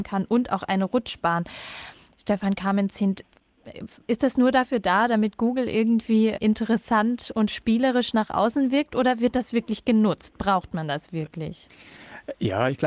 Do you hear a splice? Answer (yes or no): no